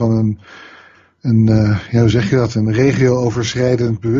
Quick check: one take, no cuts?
yes; 0 cuts

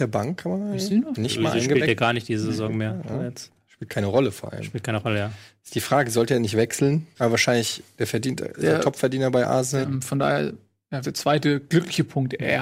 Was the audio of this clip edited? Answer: yes; 3 cuts; at 7.1 s, 9.8 s, 11.0 s

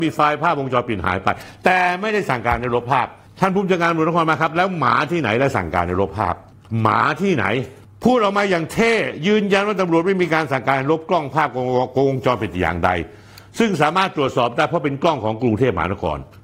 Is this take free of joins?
yes; 0 cuts

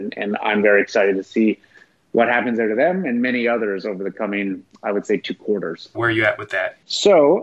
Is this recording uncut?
no; 1 cut; at 5.9 s

